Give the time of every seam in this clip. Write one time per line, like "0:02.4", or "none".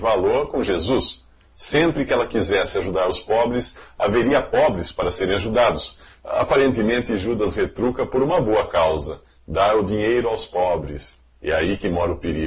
0:06.2